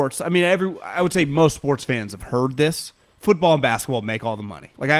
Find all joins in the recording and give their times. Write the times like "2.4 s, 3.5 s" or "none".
none